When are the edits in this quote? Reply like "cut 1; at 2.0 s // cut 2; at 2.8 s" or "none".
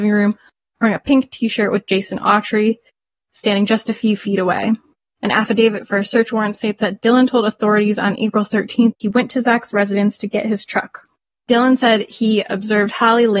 cut 1; at 5.2 s // cut 2; at 8.9 s